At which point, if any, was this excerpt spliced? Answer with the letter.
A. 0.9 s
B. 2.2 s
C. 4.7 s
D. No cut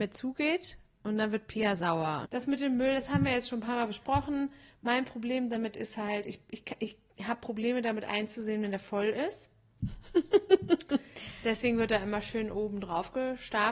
B